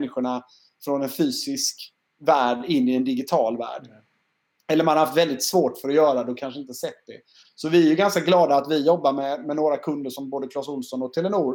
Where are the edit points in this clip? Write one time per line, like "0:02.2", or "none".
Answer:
none

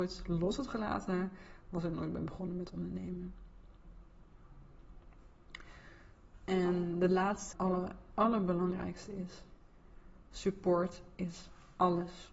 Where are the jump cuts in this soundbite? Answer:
0:07.5

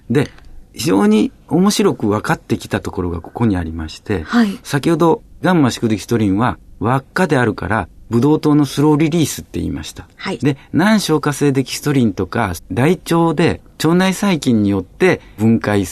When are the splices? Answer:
0:10.4
0:12.6

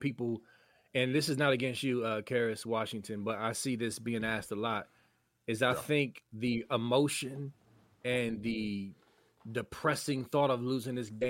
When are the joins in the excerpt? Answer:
none

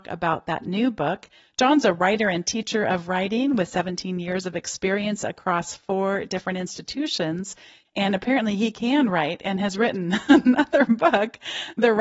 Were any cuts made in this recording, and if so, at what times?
0:07.8

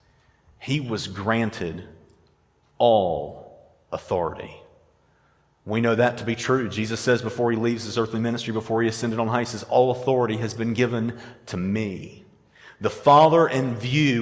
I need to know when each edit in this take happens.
none

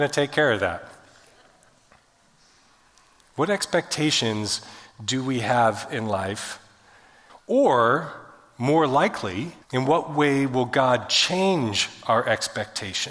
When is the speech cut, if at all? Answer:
0:07.3
0:09.6

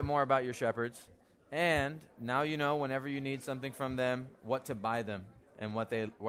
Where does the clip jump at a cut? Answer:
none

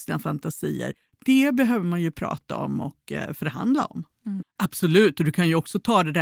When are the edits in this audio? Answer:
0:04.4

